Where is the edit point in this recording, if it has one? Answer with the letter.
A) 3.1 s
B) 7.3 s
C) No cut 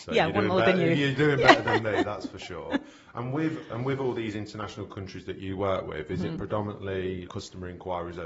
B